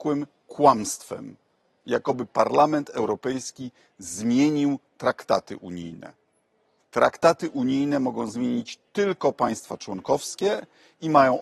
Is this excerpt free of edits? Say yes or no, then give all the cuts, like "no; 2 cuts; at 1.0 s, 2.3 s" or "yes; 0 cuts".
no; 1 cut; at 6.8 s